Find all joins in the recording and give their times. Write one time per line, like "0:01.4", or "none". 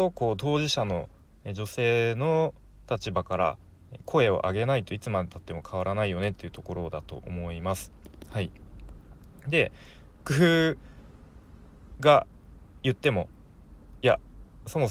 0:10.3